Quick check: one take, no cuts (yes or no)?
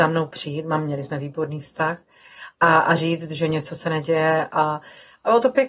yes